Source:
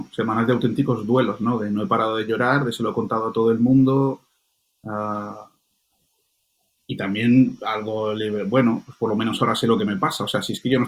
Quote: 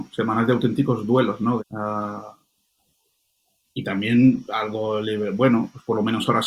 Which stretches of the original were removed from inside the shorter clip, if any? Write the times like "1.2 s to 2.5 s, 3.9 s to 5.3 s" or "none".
1.6 s to 4.7 s